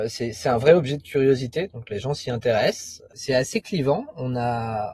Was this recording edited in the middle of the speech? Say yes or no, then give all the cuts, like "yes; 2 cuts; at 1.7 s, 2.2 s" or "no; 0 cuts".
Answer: no; 0 cuts